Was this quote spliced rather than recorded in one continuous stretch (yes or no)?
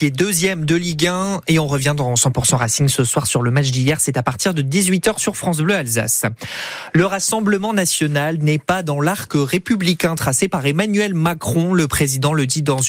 no